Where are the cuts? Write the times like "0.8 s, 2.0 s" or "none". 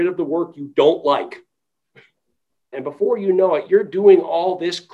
2.7 s